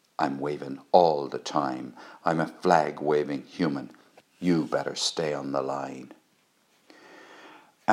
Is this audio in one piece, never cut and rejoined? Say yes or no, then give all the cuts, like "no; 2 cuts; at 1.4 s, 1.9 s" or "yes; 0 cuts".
yes; 0 cuts